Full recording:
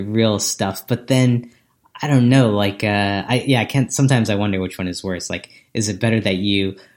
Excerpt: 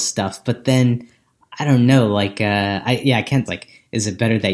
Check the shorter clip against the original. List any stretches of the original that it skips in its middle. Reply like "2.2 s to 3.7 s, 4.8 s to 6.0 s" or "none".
3.9 s to 5.3 s